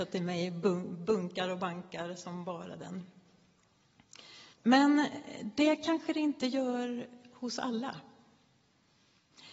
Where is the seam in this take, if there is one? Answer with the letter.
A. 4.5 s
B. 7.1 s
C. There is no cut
A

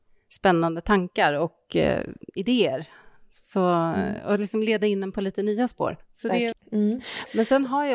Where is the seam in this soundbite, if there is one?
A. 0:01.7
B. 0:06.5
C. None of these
B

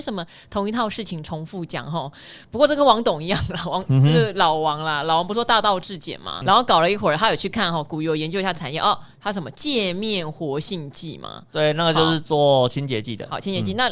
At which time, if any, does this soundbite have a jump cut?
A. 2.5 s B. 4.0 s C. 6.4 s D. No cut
C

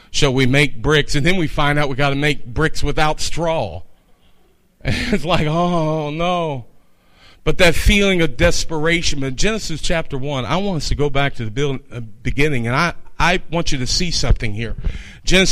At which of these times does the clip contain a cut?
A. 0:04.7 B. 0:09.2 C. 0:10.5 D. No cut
D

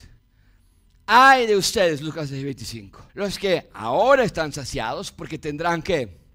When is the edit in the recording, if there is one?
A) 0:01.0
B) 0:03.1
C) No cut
B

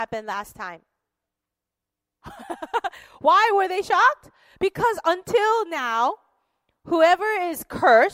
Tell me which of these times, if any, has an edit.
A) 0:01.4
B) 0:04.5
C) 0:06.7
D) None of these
A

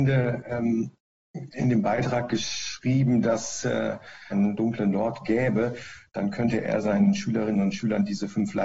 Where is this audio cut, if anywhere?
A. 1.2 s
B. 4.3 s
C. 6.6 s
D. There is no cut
B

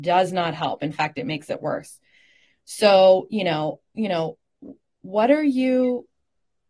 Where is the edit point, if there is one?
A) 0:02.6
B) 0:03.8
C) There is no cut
B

